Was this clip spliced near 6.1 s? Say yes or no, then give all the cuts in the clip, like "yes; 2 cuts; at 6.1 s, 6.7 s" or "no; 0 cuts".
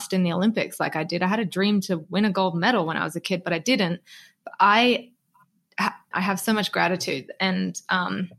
yes; 1 cut; at 6.1 s